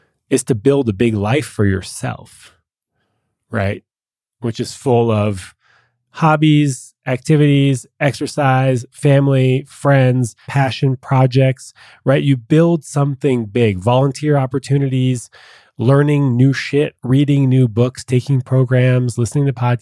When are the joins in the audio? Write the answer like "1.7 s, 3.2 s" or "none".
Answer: 10.4 s